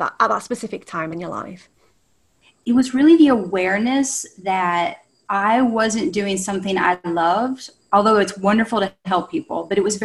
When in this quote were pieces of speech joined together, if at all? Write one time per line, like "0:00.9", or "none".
none